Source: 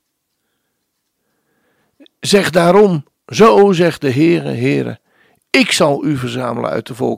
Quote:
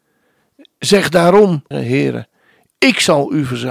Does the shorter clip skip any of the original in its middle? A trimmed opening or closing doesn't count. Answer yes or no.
yes